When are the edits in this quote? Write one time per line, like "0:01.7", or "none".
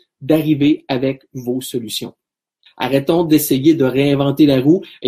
none

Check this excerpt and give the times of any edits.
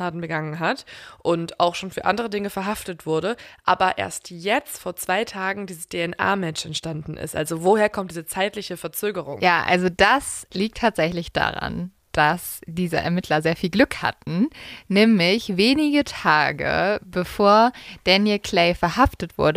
none

